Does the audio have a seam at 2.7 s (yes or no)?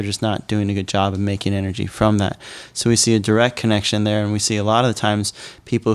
no